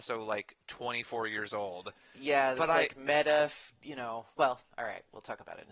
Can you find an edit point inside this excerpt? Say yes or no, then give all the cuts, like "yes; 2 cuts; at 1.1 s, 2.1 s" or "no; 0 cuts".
no; 0 cuts